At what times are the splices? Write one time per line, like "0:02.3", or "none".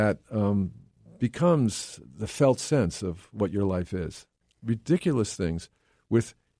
0:04.4